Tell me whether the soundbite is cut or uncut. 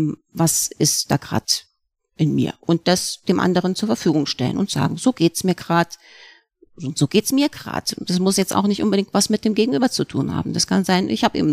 uncut